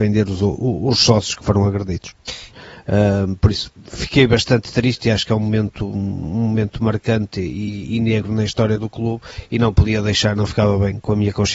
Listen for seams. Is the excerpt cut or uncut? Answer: cut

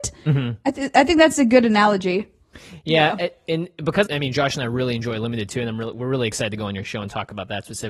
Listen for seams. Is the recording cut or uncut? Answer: cut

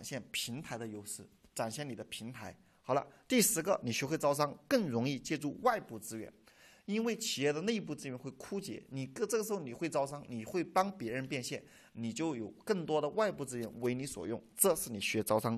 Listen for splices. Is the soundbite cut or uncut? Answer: uncut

